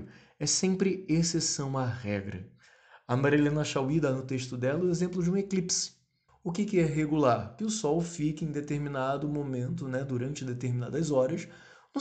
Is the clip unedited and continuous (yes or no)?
no